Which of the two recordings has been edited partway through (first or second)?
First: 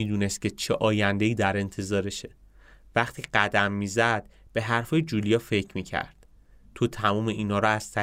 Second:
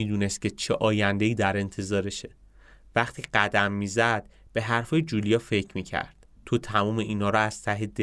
second